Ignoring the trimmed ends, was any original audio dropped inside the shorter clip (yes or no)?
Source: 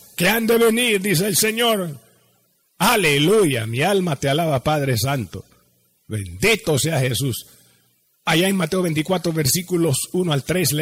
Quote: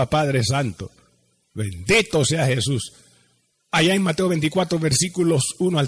no